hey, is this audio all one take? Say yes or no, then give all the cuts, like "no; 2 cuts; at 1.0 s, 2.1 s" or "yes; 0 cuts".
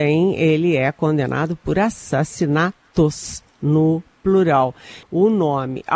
no; 1 cut; at 5.0 s